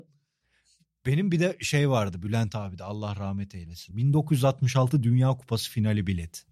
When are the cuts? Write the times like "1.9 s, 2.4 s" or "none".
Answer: 3.9 s